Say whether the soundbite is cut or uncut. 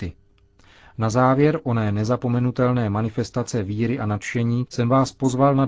cut